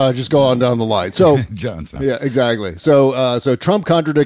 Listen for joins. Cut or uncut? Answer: cut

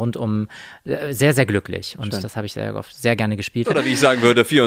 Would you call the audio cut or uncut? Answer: cut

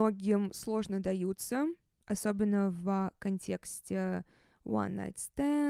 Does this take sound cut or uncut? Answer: uncut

